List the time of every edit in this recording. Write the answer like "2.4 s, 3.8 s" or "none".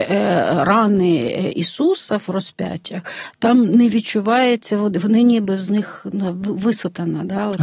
none